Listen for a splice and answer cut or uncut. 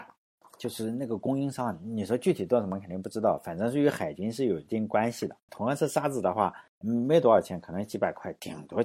cut